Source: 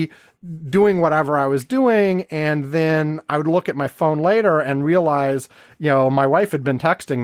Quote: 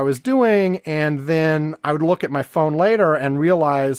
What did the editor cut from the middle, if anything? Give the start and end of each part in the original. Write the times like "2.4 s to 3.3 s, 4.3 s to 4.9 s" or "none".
none